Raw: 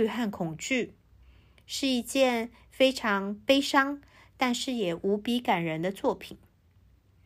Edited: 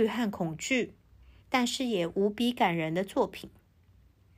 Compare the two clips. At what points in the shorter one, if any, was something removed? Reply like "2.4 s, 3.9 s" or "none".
1.4 s